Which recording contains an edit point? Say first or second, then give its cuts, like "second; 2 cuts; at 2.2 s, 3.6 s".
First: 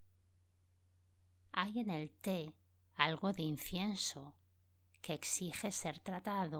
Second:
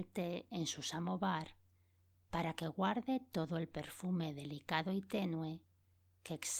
first; 1 cut; at 1.5 s